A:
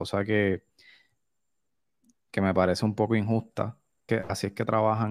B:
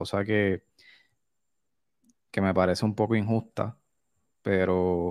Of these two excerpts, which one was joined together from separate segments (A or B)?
A